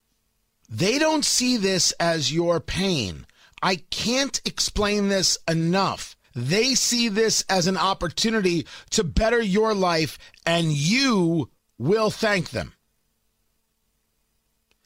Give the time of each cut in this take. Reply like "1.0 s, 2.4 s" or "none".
6.2 s

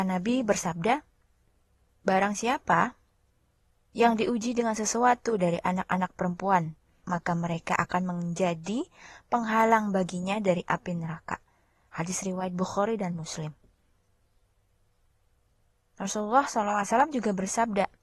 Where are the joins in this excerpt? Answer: 7.0 s

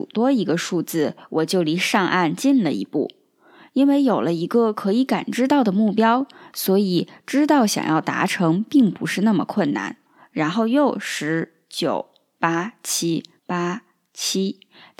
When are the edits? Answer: 10.1 s, 13.4 s

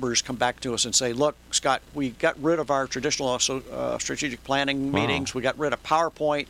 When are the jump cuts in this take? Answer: none

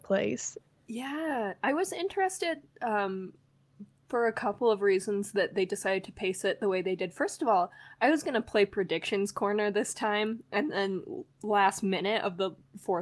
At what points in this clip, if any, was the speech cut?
none

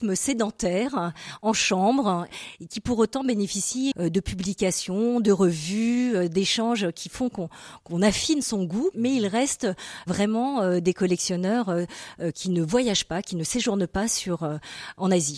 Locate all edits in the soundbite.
3.9 s

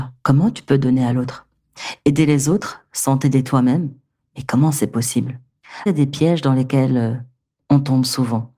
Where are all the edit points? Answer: 5.9 s

